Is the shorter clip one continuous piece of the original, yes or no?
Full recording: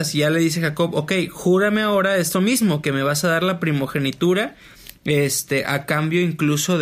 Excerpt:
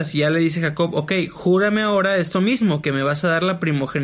yes